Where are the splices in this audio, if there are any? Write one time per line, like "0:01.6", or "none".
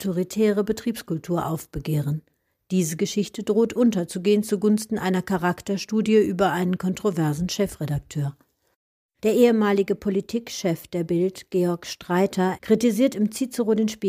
0:09.2
0:12.6